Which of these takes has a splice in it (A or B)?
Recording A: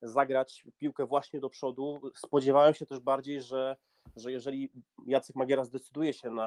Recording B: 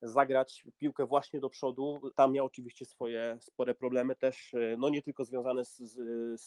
B